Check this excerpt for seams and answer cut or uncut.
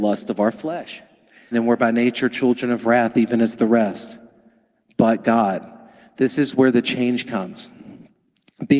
cut